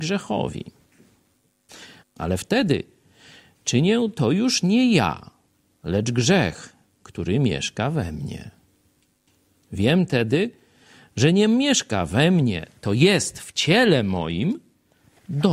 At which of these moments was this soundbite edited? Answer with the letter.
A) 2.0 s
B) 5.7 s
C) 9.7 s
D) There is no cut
A